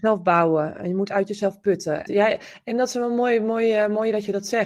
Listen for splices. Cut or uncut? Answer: cut